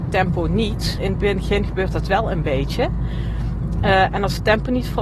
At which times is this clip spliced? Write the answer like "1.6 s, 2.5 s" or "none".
1.0 s